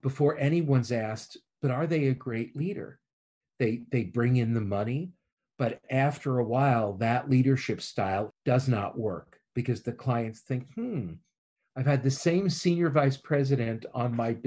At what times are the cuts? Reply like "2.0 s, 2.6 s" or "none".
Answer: 3.4 s, 8.3 s